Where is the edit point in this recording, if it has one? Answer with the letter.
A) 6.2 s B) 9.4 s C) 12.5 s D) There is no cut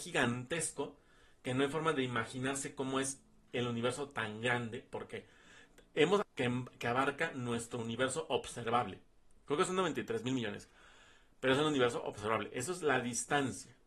A